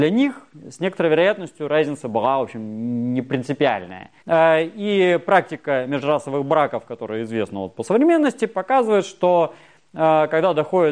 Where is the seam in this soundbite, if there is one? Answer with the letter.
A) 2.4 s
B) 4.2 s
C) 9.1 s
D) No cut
B